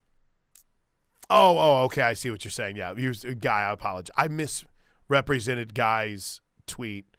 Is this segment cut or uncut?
uncut